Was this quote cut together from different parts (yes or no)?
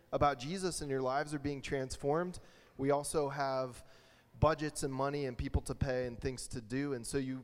no